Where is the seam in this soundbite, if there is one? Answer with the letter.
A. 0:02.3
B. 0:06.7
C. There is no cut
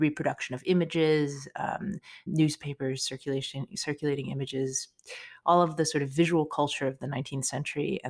A